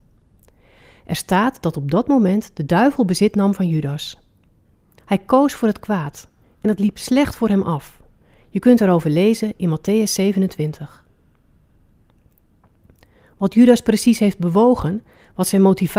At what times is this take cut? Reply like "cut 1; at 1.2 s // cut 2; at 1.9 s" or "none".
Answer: cut 1; at 5.0 s